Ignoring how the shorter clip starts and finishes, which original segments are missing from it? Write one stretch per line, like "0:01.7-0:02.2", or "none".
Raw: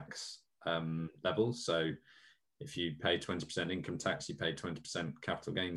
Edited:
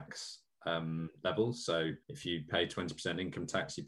0:02.0-0:02.5